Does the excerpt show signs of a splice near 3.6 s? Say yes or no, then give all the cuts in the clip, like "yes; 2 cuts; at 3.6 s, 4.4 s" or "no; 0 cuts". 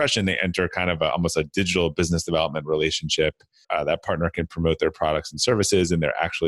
yes; 1 cut; at 3.6 s